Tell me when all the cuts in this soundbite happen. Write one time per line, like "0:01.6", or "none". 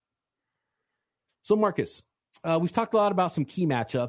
none